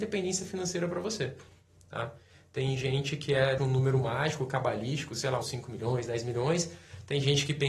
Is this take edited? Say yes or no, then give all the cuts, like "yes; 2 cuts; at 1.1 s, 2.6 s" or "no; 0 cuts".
yes; 2 cuts; at 3.6 s, 5.4 s